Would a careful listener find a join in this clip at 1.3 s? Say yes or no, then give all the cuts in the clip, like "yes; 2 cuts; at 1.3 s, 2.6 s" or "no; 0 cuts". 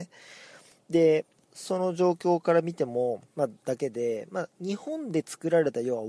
yes; 2 cuts; at 1.3 s, 3.3 s